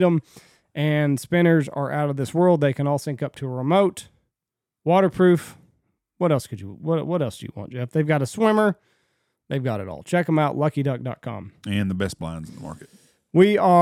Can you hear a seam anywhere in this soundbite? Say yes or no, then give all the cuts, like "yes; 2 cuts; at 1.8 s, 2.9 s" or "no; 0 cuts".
no; 0 cuts